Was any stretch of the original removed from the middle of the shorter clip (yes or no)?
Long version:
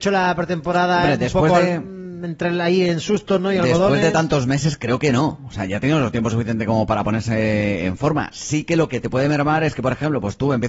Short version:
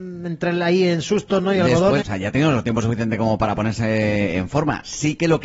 yes